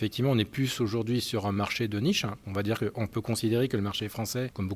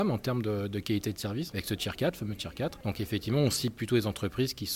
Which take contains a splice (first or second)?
second